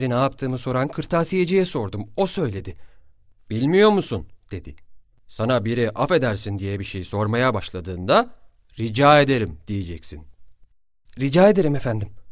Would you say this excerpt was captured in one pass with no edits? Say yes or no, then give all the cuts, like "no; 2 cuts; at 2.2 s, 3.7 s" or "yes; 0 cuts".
yes; 0 cuts